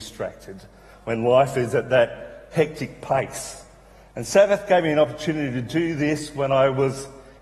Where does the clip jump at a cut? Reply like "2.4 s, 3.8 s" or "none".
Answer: none